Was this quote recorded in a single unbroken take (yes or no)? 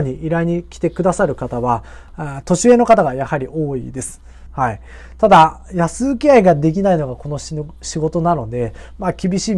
no